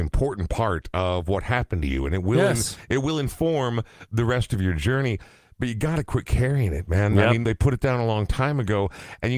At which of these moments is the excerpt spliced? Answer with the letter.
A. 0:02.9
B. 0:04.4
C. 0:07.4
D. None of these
C